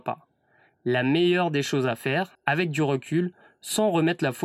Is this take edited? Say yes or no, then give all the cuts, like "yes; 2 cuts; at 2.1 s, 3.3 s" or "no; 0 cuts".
yes; 1 cut; at 2.4 s